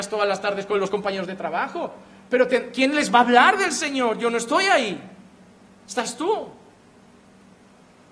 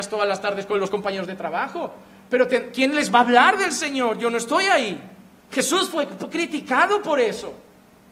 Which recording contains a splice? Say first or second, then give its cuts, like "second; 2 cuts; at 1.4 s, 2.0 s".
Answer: second; 1 cut; at 5.4 s